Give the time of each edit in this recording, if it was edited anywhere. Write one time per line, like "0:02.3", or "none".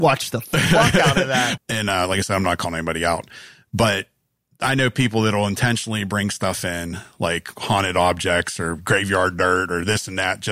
0:01.6